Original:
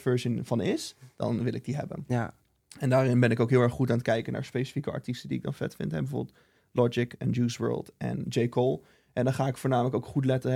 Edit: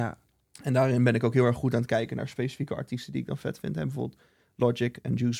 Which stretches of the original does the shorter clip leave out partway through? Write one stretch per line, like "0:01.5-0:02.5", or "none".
none